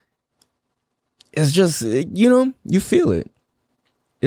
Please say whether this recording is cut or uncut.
uncut